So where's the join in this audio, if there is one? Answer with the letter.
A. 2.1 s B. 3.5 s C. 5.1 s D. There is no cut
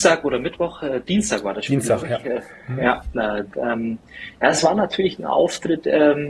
B